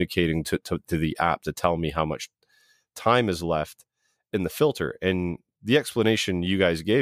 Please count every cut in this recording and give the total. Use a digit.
0